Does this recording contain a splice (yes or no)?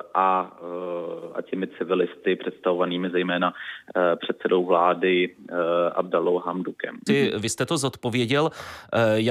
yes